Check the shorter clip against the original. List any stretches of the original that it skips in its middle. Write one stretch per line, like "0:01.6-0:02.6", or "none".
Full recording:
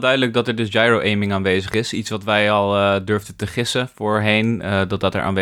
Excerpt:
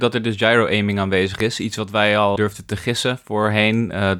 0:02.7-0:03.1